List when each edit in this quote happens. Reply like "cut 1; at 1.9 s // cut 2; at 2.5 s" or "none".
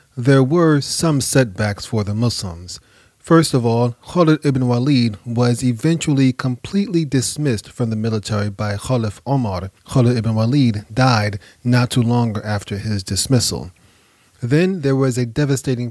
cut 1; at 9.8 s

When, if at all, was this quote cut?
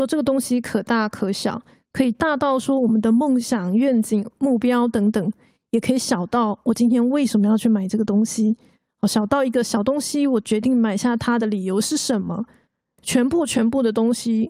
none

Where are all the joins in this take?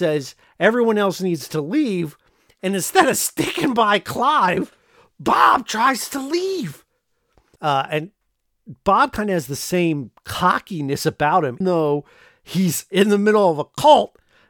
cut 1; at 7.6 s // cut 2; at 11.6 s

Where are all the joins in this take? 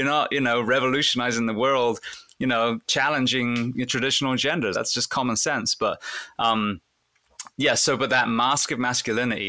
cut 1; at 2.8 s // cut 2; at 4.7 s // cut 3; at 7.5 s

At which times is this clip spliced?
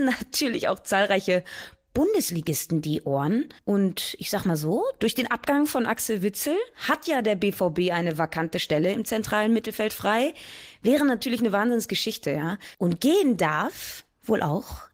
cut 1; at 3.6 s // cut 2; at 12.7 s

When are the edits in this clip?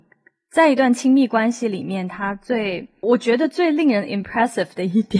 cut 1; at 3.0 s

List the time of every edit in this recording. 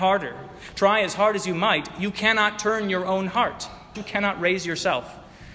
cut 1; at 3.9 s

